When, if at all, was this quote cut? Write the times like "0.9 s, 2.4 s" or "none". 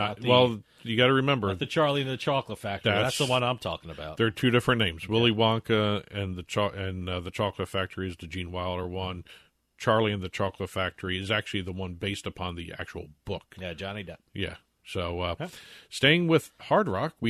none